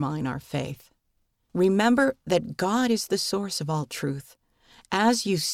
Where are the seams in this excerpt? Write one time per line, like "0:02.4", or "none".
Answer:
0:01.5